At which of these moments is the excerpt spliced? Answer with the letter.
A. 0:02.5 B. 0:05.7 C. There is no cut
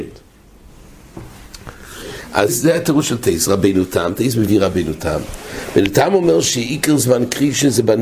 A